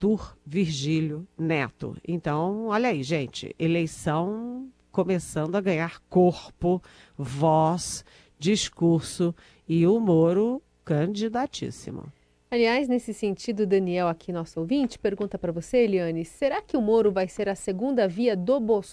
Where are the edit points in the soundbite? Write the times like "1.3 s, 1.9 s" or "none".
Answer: none